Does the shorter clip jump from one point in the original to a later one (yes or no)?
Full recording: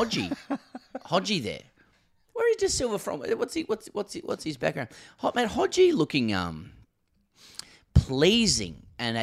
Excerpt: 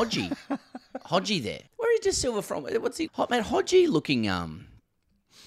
yes